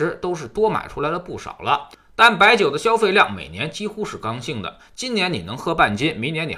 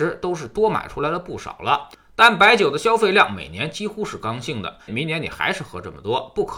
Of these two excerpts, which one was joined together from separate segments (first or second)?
second